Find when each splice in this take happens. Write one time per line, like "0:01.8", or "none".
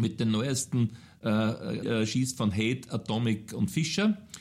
0:01.8